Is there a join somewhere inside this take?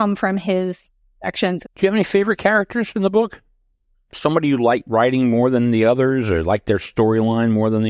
yes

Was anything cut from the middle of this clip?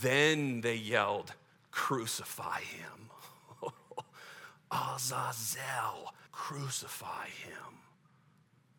yes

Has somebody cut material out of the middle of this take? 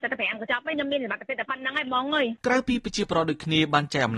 yes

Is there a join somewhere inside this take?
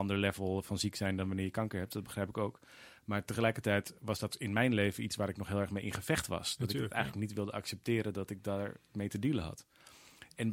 no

